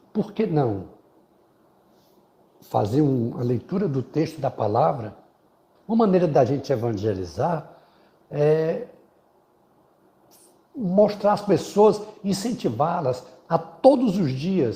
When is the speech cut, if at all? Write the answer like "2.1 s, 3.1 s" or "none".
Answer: 5.8 s